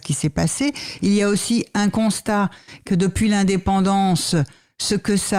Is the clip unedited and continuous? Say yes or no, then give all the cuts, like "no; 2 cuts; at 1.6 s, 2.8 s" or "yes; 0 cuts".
yes; 0 cuts